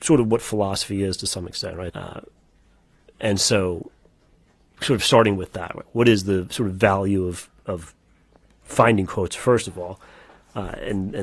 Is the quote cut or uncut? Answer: cut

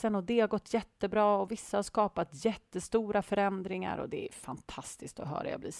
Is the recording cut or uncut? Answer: uncut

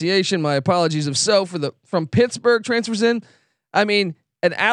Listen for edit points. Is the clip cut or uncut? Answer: uncut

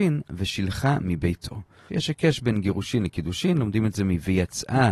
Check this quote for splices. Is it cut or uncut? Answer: cut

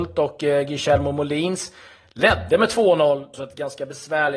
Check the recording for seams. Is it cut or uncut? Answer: cut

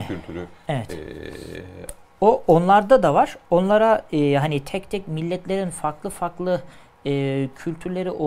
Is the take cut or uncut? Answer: uncut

